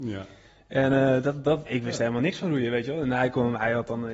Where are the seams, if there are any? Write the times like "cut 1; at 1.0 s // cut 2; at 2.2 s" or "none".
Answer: cut 1; at 1.7 s